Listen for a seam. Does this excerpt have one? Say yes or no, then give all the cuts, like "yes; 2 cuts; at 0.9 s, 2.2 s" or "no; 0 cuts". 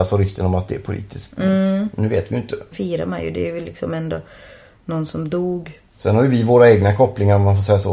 yes; 1 cut; at 2.7 s